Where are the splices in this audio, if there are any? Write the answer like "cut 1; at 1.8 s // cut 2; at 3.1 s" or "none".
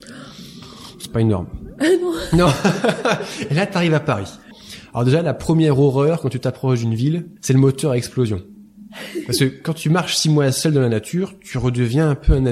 cut 1; at 7.4 s